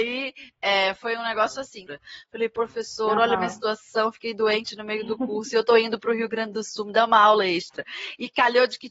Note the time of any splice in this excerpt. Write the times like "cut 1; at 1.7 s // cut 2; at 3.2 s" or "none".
cut 1; at 1.9 s

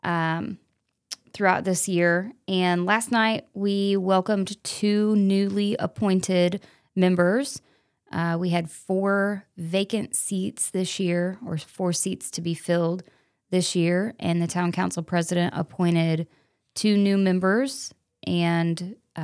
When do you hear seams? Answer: none

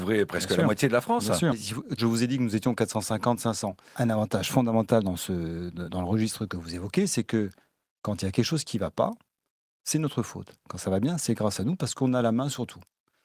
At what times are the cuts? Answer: cut 1; at 2.0 s // cut 2; at 3.9 s

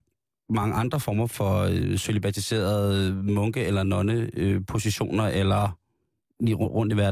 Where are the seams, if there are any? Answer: none

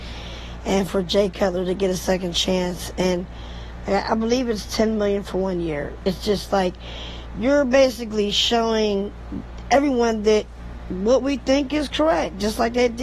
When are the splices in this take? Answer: none

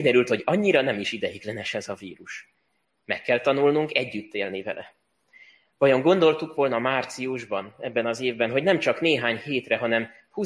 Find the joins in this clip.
none

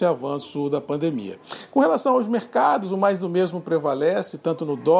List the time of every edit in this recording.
none

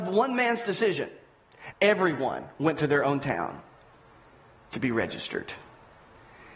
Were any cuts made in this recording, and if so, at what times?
cut 1; at 1.7 s

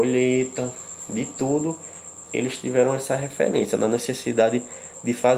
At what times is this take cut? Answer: none

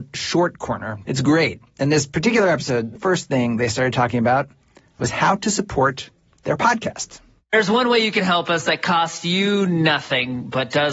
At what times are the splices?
cut 1; at 1.1 s // cut 2; at 3.0 s

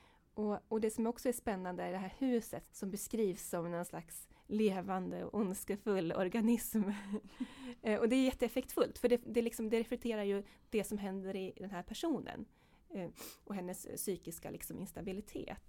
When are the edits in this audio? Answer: cut 1; at 2.6 s

